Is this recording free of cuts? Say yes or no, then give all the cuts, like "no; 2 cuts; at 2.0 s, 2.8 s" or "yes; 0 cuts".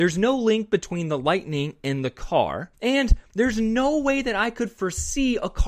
no; 1 cut; at 2.7 s